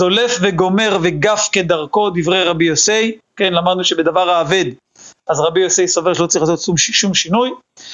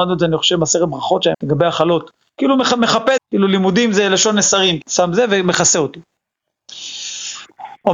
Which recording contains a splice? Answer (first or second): second